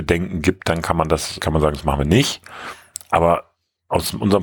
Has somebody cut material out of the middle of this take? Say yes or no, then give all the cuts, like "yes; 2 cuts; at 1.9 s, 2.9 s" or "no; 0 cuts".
yes; 1 cut; at 1.4 s